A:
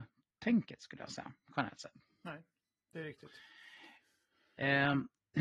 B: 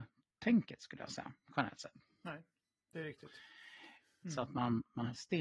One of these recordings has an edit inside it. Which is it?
B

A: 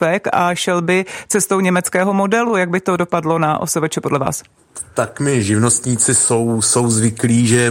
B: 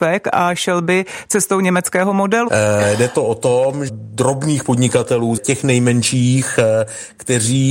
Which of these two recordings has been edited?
B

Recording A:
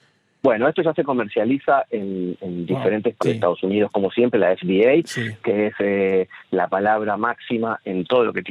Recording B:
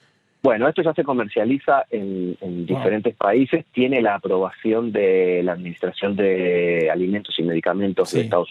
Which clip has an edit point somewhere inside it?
A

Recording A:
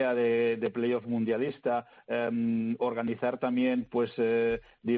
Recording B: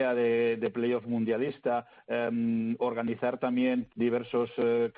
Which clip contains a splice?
B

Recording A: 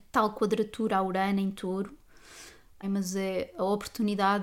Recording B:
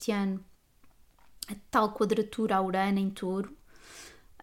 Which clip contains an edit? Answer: A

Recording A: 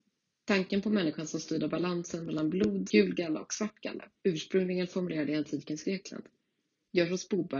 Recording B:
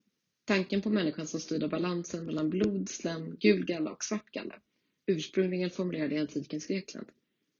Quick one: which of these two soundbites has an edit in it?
A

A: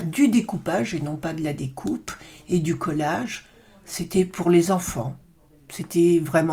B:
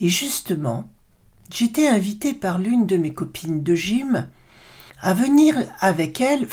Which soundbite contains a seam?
B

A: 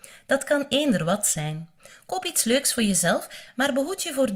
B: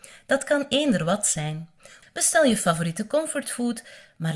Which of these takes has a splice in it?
B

